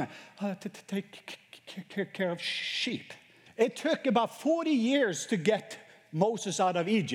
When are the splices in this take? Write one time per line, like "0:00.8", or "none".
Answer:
0:03.5